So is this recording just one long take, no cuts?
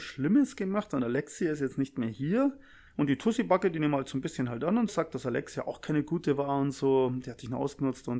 no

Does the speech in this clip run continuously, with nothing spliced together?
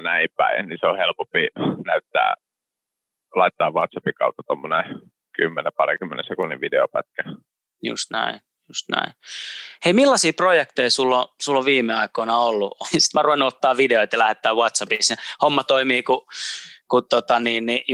no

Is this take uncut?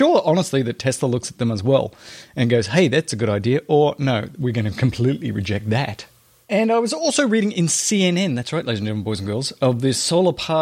yes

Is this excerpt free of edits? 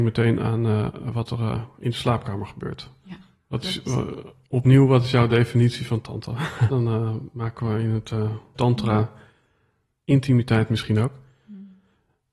no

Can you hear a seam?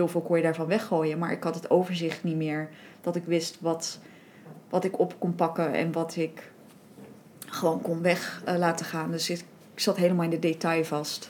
no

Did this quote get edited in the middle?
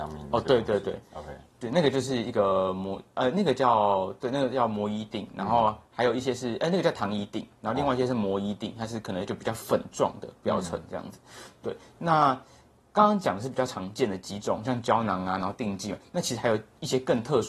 no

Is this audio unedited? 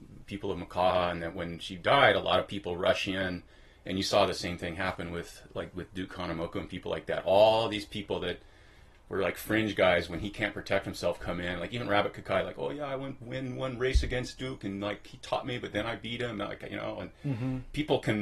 yes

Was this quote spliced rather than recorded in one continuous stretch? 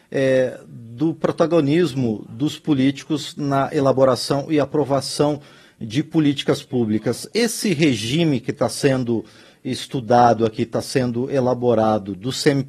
no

